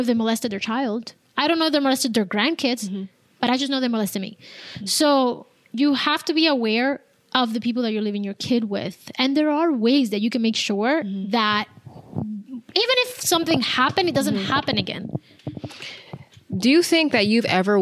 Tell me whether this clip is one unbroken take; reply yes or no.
yes